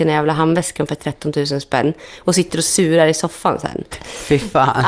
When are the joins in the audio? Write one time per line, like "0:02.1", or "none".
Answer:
0:03.9